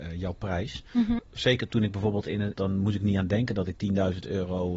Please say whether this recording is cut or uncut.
cut